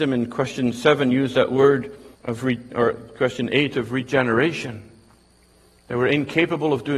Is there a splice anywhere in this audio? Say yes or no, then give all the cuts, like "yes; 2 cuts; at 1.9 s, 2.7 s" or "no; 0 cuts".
yes; 1 cut; at 2.1 s